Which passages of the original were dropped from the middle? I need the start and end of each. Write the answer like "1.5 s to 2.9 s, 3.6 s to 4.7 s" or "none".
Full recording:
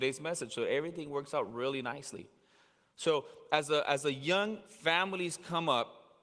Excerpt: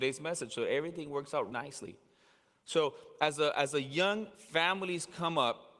1.5 s to 1.8 s